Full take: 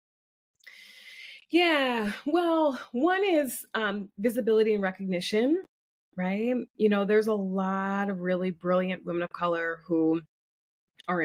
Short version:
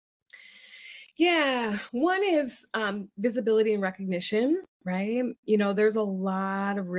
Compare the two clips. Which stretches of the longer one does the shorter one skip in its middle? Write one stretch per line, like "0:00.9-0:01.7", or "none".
0:02.2-0:02.9
0:05.7-0:06.0